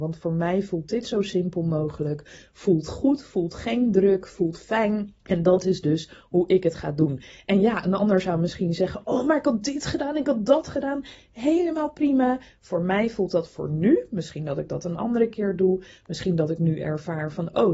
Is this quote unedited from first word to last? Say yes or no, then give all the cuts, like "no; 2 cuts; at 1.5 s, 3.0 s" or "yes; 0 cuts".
no; 1 cut; at 5.2 s